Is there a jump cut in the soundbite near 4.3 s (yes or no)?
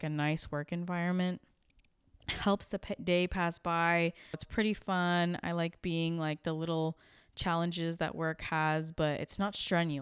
yes